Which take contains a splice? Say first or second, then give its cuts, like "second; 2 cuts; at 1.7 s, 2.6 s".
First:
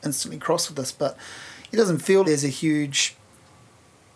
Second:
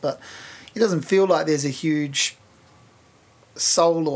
first; 1 cut; at 2.2 s